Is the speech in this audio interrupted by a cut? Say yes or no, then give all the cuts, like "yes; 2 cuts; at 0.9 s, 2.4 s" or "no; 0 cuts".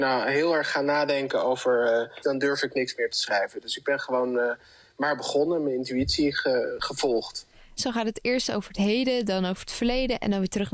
yes; 2 cuts; at 2.2 s, 7.8 s